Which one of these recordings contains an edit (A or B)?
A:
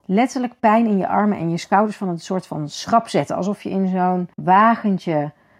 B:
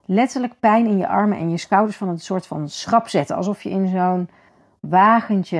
A